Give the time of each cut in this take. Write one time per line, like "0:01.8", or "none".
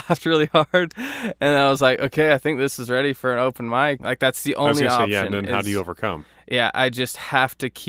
0:04.0